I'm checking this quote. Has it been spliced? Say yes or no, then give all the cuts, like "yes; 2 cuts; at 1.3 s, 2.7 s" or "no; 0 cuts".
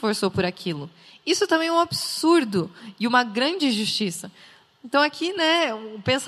no; 0 cuts